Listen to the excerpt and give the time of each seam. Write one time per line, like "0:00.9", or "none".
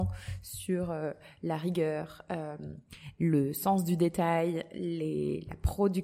none